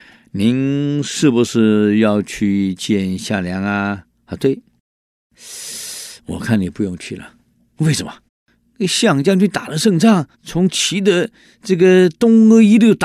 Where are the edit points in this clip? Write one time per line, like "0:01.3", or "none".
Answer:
0:08.3
0:10.3